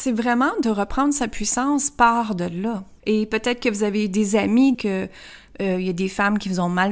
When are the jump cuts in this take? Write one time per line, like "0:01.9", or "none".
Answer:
0:03.0
0:04.7